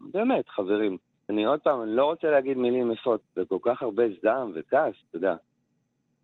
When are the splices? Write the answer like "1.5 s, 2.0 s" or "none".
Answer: 1.3 s, 3.2 s, 5.0 s